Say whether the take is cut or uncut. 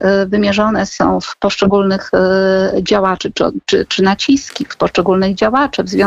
uncut